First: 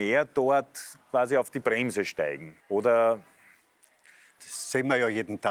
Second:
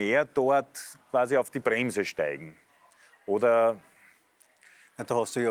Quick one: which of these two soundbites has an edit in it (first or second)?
first